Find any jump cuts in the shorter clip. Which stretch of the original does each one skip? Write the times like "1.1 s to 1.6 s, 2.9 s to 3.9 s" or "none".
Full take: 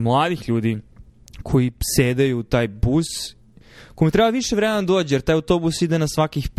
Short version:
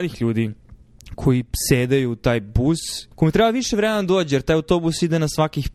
3.4 s to 3.9 s